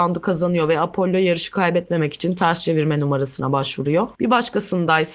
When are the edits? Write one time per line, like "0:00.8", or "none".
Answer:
0:04.2